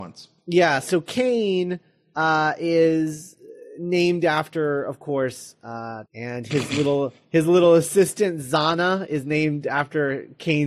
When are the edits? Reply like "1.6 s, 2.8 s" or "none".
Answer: 6.1 s